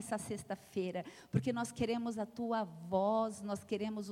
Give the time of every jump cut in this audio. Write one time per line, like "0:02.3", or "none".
none